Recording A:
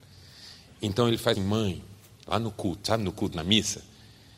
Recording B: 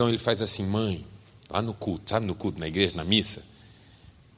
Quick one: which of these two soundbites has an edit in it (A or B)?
A